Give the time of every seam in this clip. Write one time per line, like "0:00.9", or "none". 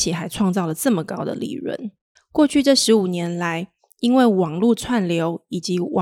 0:02.2